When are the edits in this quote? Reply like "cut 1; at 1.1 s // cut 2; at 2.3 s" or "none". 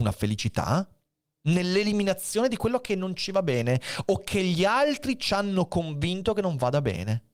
cut 1; at 1.2 s